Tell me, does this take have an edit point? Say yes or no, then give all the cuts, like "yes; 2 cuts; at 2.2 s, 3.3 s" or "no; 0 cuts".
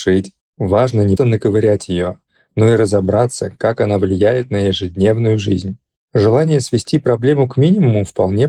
yes; 2 cuts; at 1.2 s, 6.0 s